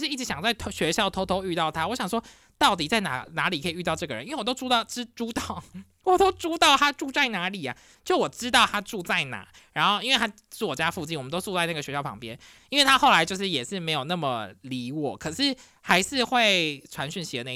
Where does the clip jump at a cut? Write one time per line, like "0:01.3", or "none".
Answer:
0:12.6

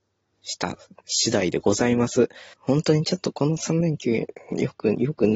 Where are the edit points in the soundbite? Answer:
0:02.5

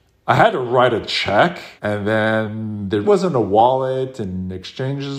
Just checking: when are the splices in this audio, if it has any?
0:01.8
0:03.0

